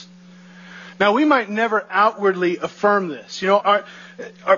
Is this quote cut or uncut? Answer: cut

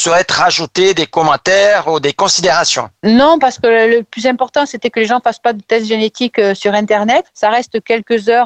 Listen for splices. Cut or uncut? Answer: cut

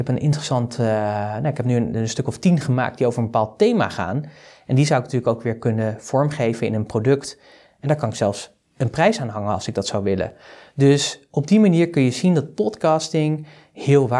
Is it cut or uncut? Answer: uncut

